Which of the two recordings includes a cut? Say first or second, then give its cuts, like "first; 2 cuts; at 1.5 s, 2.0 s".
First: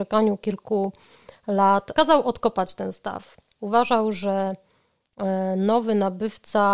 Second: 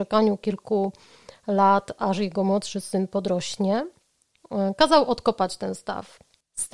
first; 2 cuts; at 1.9 s, 3.5 s